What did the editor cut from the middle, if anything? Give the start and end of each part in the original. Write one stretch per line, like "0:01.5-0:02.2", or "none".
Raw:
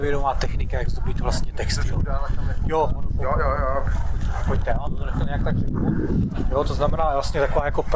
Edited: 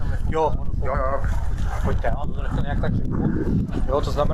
0:03.3-0:03.6